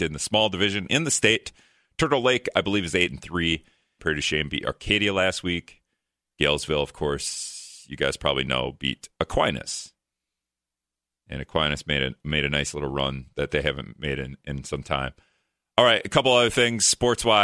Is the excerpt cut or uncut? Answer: cut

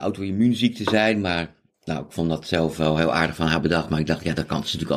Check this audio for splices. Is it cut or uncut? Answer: uncut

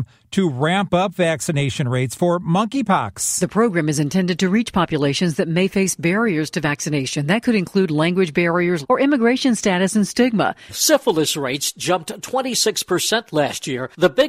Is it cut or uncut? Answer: cut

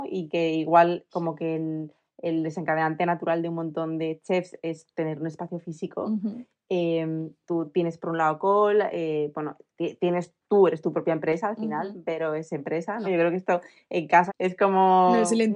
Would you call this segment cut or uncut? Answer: cut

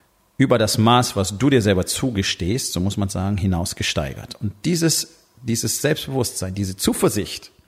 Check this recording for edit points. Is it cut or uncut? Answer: uncut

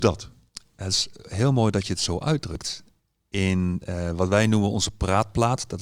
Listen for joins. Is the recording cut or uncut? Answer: uncut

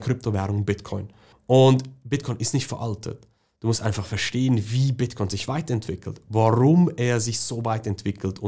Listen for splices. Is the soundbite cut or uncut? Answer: uncut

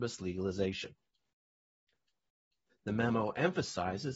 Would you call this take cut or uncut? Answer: cut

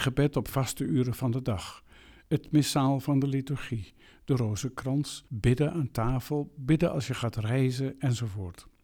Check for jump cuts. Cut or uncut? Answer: uncut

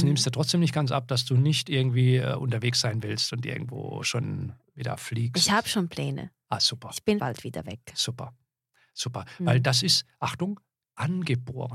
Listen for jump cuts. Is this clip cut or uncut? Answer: cut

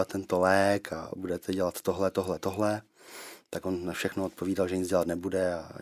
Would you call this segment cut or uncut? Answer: uncut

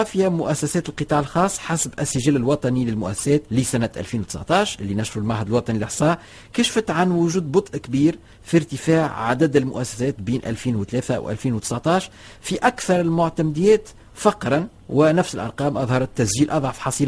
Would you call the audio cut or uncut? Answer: cut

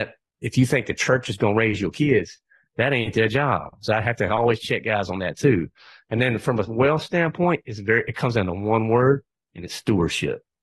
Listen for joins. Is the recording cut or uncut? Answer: uncut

